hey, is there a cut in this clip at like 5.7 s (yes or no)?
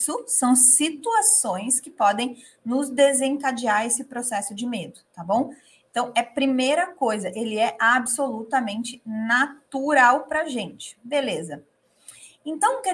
no